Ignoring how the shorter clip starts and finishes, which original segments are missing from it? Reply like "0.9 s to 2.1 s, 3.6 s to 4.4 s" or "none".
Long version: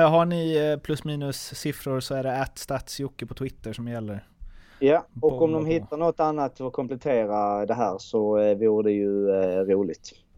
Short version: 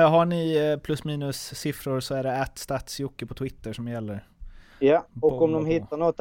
none